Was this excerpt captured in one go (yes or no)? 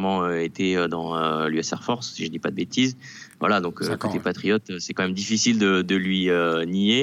yes